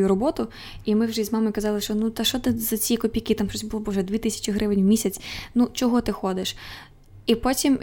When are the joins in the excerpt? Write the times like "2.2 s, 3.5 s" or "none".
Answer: none

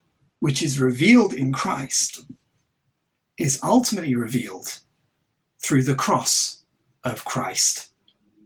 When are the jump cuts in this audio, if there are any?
none

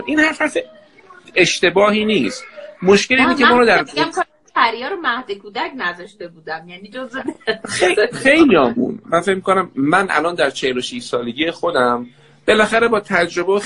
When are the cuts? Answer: none

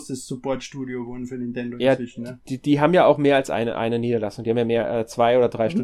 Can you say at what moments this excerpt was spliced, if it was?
none

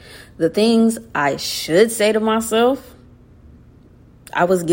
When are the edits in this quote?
none

